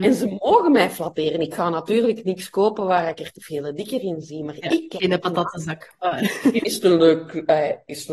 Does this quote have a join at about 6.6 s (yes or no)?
yes